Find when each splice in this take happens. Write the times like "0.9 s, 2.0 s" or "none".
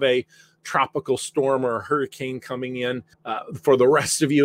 3.1 s